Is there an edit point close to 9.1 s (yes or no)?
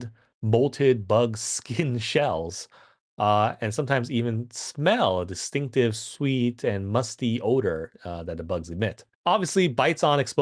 yes